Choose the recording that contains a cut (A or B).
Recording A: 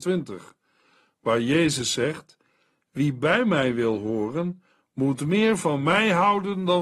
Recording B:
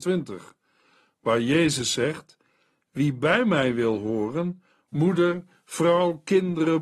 B